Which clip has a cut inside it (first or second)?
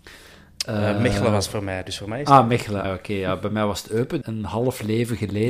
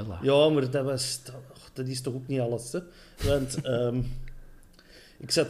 first